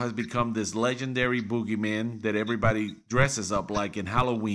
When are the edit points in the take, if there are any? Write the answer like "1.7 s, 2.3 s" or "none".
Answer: none